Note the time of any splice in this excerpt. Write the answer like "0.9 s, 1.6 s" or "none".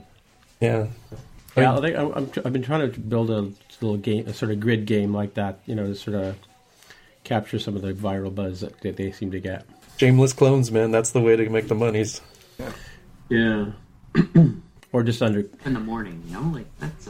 none